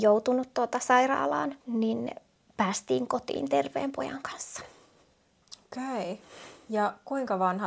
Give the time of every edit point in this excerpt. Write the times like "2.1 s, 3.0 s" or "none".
1.6 s